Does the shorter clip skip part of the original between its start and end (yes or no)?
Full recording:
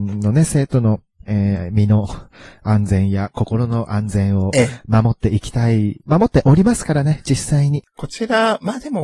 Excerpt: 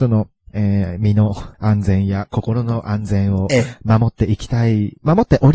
yes